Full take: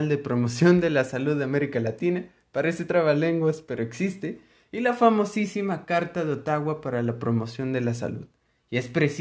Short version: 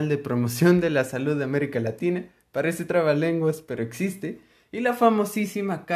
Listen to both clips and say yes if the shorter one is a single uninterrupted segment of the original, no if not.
yes